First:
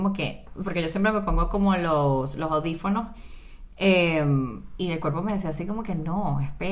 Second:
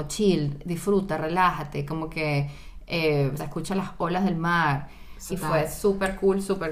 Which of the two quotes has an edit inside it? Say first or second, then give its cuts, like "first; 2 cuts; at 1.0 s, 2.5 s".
second; 2 cuts; at 3.4 s, 5.3 s